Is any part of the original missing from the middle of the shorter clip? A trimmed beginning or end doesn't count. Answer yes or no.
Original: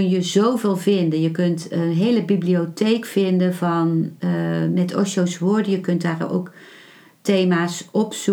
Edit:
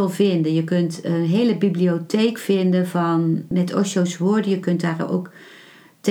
yes